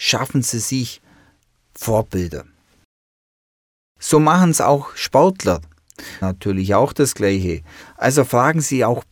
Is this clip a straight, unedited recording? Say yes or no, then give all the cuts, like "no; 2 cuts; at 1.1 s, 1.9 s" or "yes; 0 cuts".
no; 2 cuts; at 6.2 s, 7.8 s